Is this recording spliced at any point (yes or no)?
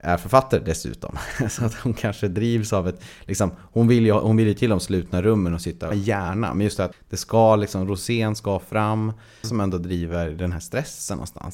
yes